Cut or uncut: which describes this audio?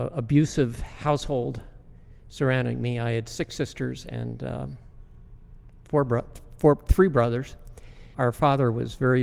cut